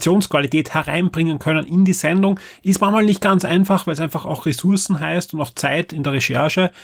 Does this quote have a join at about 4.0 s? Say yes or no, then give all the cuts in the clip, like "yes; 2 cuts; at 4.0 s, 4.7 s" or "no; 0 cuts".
no; 0 cuts